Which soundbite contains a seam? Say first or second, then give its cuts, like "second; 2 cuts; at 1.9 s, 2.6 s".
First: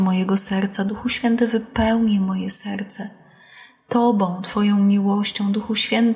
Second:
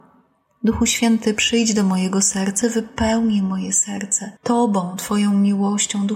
second; 2 cuts; at 2.6 s, 4.4 s